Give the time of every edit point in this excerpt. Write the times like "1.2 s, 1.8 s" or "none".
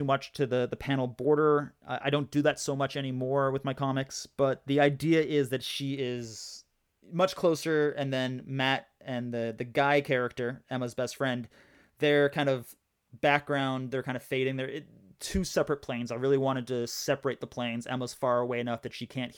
none